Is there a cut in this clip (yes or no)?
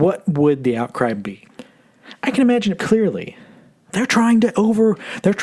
yes